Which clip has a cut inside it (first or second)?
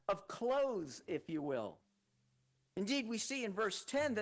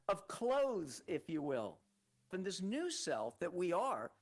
second